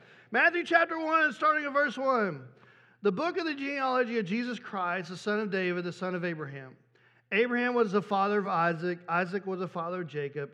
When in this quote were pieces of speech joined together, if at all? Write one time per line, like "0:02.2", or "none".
none